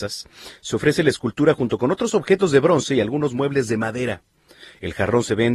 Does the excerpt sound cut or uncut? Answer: uncut